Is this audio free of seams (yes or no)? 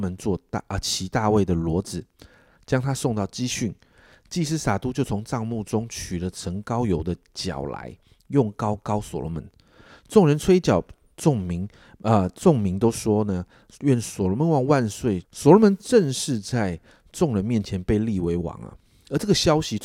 no